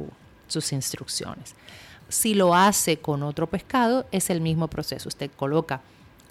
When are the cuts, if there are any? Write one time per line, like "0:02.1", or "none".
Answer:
0:02.0